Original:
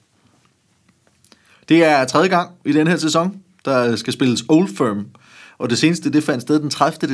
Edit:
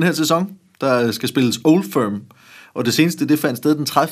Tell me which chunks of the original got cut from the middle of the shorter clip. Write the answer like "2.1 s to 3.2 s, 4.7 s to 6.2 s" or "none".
none